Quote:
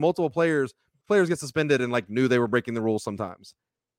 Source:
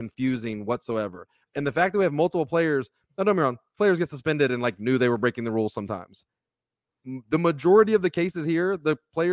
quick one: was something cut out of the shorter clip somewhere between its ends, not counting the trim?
yes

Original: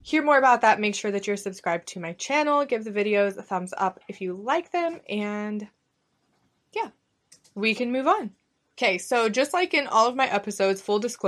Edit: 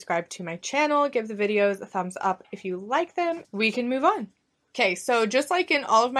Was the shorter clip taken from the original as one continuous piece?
no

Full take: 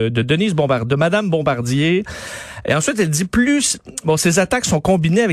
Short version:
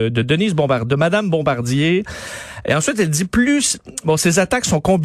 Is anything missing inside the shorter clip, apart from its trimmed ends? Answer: no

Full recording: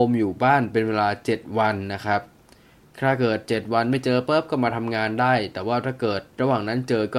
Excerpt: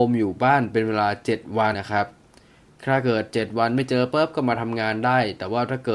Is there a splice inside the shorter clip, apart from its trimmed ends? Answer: yes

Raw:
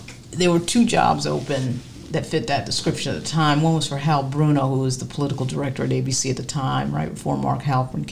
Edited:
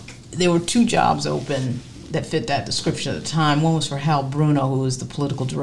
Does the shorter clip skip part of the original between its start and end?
no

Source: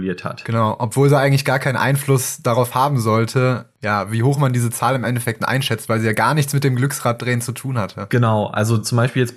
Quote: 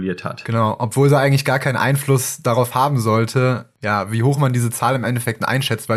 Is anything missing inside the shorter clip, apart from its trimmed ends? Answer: no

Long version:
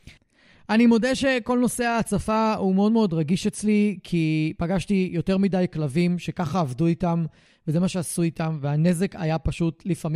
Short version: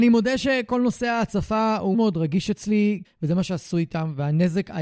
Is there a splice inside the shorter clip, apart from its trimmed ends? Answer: yes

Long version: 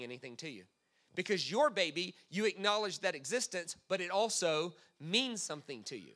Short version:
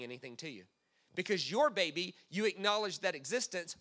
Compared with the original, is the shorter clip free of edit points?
yes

